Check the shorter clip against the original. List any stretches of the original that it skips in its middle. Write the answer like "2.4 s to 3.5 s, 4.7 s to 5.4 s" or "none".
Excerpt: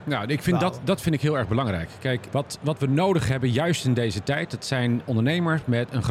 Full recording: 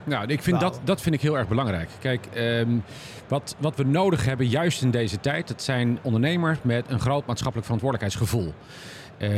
2.3 s to 3.3 s